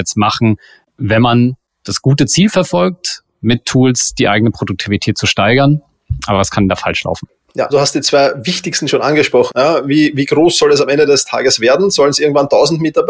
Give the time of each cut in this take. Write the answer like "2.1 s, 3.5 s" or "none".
7.7 s, 9.5 s